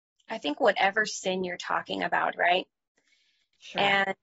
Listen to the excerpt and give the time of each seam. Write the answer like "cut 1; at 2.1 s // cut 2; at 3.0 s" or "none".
cut 1; at 2.3 s